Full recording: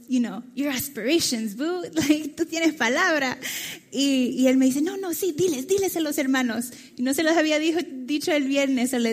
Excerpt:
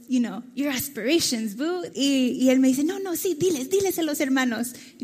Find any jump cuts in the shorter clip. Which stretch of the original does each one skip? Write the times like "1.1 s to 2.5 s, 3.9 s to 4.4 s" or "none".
1.9 s to 3.9 s